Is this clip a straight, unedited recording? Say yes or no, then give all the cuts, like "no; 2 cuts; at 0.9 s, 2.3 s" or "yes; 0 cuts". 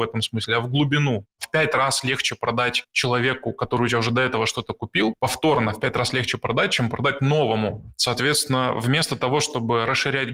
yes; 0 cuts